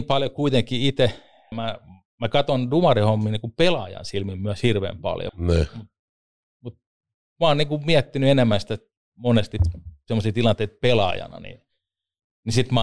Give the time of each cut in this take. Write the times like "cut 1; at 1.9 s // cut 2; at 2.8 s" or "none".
cut 1; at 1.5 s // cut 2; at 5.3 s